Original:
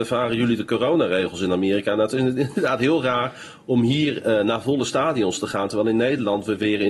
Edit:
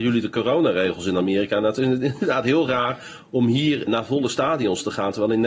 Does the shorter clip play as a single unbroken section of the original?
no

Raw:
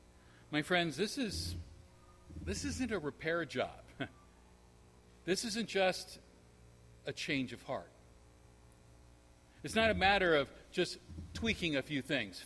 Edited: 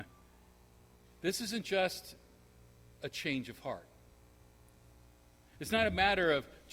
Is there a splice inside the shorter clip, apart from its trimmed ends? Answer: no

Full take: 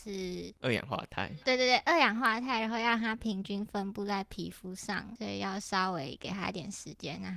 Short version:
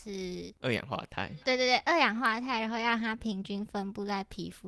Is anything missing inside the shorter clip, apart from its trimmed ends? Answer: no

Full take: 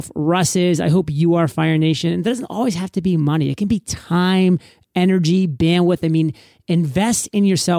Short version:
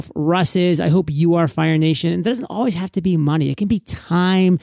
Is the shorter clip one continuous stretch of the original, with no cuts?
yes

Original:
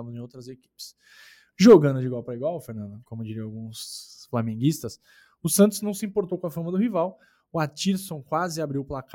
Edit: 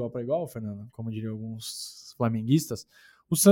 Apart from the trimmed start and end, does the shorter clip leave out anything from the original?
no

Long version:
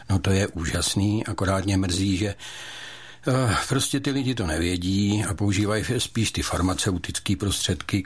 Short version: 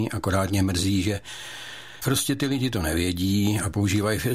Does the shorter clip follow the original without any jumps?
no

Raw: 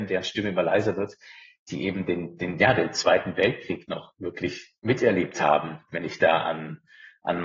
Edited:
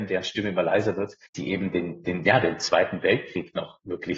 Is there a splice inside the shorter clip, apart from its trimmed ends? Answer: yes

